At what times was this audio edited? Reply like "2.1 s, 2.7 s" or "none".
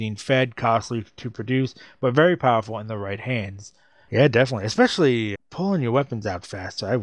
4.1 s, 5.3 s